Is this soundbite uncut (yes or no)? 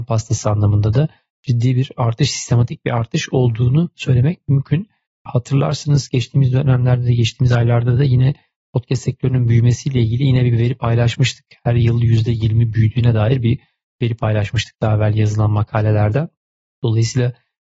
yes